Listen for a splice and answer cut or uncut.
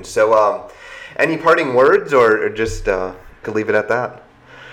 cut